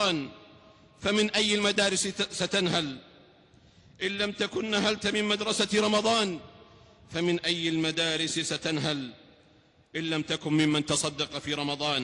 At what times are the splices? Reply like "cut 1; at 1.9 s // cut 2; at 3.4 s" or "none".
none